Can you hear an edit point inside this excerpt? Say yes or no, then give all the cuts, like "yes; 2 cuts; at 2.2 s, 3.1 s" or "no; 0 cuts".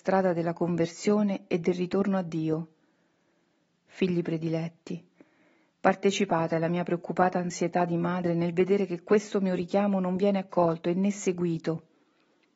no; 0 cuts